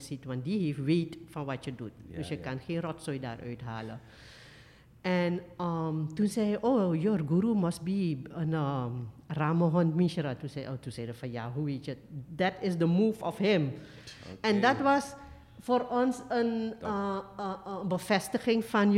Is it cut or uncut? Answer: uncut